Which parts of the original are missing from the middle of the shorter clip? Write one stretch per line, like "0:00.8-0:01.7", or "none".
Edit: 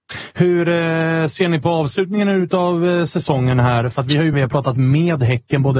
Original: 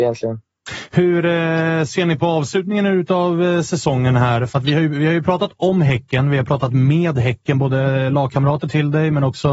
0:04.9-0:06.3

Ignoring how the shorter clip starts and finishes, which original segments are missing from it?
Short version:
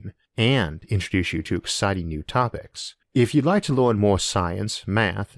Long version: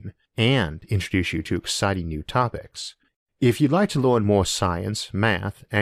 0:03.0-0:03.3

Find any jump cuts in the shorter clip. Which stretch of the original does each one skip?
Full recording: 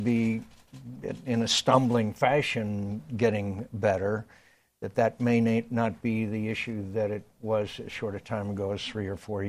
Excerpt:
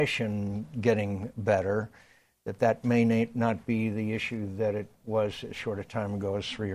none

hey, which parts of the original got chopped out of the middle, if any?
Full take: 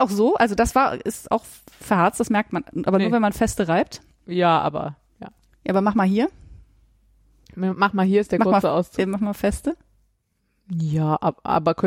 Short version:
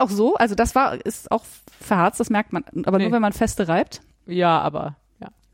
none

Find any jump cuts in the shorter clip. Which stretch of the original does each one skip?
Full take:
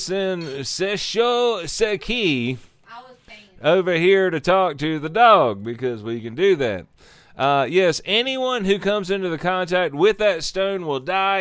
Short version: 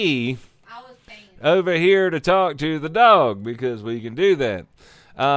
none

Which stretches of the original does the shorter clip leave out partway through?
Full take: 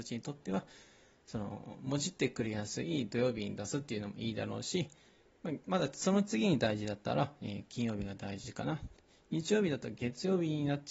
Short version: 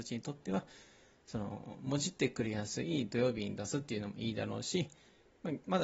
none

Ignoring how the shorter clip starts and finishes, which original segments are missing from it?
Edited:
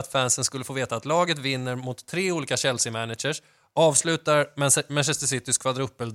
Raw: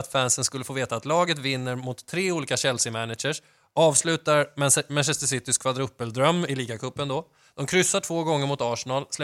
none

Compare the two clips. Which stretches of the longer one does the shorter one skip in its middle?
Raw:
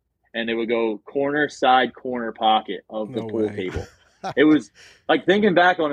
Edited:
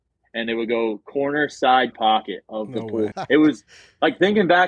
0:01.9-0:02.3
0:03.5-0:04.2

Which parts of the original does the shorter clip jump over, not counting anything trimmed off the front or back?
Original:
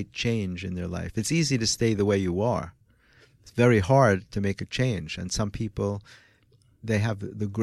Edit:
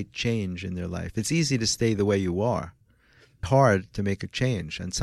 0:03.4-0:03.8

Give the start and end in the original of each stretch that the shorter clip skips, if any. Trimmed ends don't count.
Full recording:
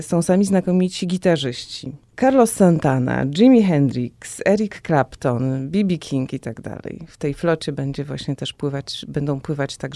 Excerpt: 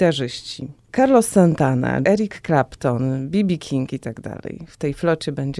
0:03.3-0:04.4

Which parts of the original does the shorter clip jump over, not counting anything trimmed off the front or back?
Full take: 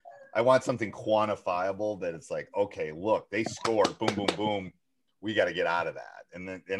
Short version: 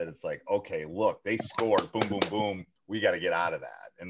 0:04.8-0:05.1

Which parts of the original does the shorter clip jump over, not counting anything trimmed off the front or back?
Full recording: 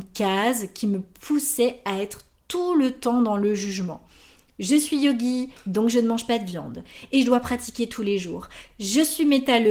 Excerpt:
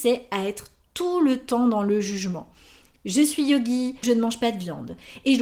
0:05.6-0:05.9

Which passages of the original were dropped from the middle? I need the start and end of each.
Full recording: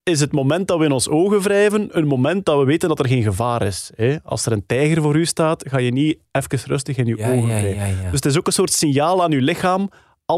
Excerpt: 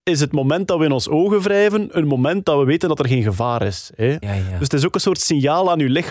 0:04.2-0:07.7

